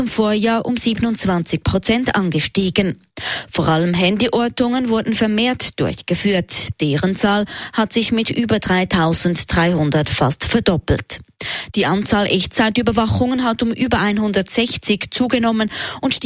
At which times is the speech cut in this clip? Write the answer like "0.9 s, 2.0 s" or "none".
none